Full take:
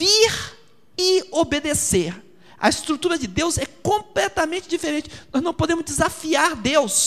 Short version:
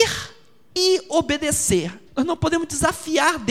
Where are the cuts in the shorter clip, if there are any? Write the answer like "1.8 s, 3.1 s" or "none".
2.1 s